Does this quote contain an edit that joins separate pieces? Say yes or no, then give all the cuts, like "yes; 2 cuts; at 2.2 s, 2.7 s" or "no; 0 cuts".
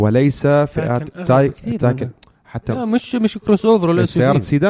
no; 0 cuts